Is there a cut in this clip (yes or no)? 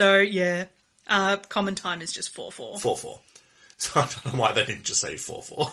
no